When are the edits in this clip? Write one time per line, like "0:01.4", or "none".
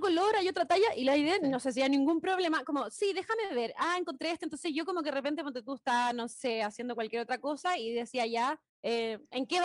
none